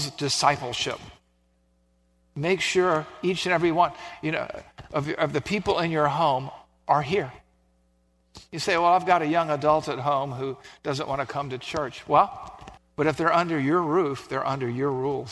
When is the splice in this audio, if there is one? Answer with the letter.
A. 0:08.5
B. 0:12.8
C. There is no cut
B